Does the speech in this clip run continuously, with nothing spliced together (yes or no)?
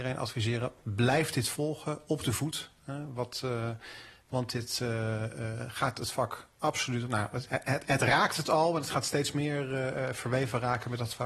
yes